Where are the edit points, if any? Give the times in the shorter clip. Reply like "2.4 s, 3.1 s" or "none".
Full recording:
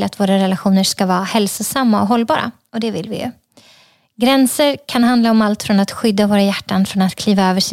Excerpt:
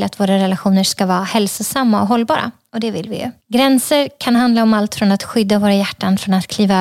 3.4 s